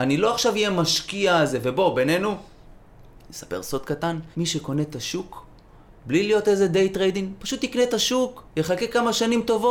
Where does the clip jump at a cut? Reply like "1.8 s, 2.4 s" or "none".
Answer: 4.3 s